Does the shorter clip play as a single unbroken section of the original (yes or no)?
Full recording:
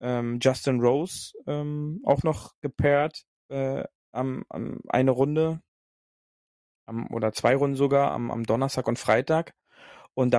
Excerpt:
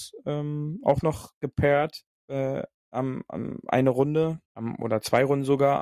no